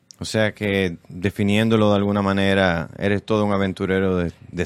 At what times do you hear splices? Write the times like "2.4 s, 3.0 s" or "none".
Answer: none